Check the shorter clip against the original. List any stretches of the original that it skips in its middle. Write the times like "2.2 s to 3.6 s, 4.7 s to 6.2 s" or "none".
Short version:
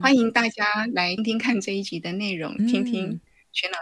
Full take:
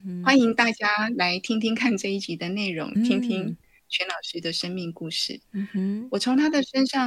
1.4 s to 1.5 s